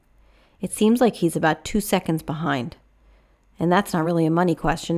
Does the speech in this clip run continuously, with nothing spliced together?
yes; 0 cuts

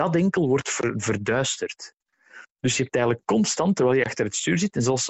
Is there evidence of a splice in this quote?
no; 0 cuts

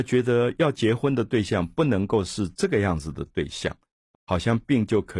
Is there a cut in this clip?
yes; 1 cut; at 4.1 s

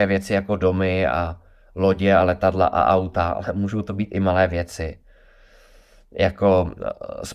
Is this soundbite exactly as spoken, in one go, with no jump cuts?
yes; 0 cuts

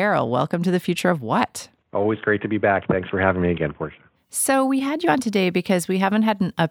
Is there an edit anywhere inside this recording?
no; 0 cuts

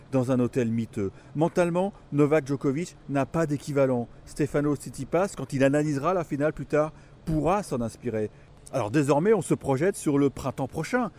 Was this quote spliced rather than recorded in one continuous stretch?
no; 0 cuts

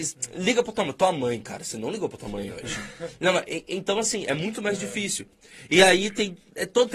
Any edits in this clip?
no; 0 cuts

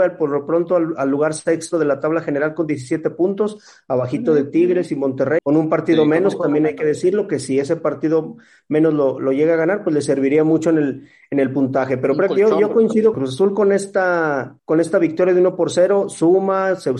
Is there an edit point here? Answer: yes; 3 cuts; at 5.4 s, 13.1 s, 14.6 s

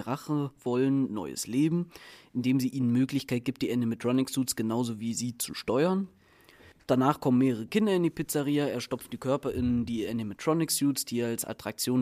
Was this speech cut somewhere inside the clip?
yes; 1 cut; at 6.8 s

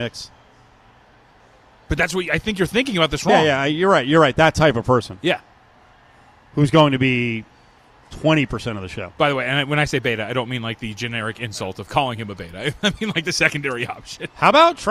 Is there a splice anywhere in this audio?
no; 0 cuts

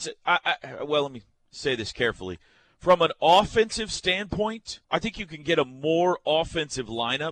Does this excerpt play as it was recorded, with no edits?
no; 1 cut; at 4.8 s

